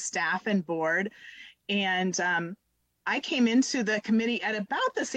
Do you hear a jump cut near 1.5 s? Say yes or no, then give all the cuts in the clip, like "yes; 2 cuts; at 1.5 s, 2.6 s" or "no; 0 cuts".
no; 0 cuts